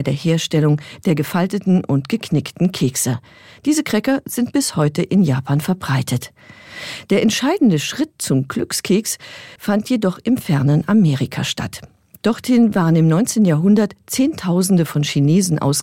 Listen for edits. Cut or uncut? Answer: cut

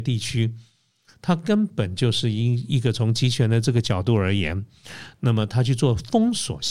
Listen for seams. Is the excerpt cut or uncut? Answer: uncut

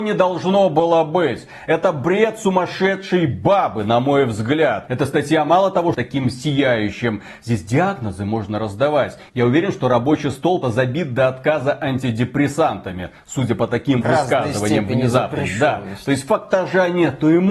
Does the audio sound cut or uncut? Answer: cut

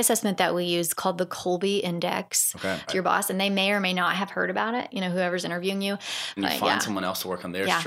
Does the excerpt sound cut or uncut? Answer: cut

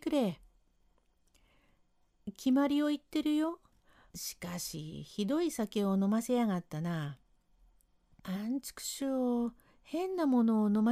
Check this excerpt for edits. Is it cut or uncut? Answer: cut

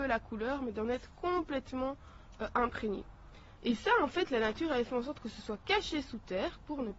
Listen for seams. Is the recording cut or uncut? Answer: cut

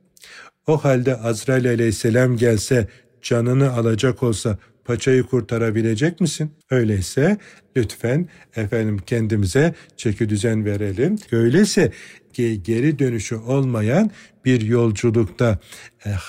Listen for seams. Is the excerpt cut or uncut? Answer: cut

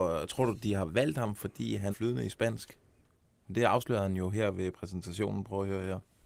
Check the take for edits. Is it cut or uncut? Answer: cut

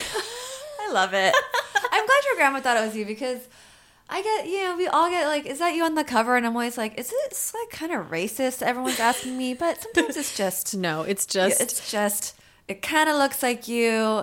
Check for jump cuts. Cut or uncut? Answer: uncut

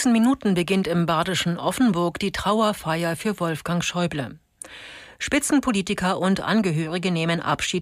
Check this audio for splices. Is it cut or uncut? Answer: uncut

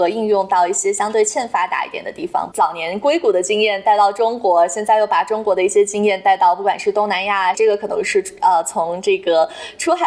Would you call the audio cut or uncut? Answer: cut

